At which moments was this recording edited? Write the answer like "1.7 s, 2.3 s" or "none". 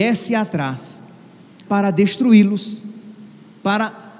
1.7 s